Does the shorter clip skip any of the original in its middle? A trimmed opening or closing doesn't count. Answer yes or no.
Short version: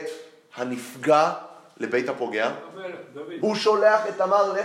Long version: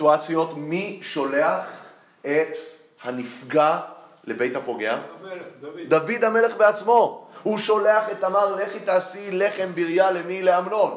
yes